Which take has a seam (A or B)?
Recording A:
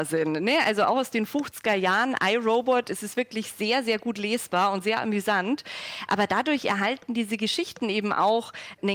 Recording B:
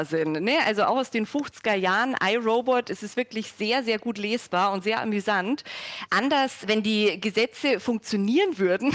B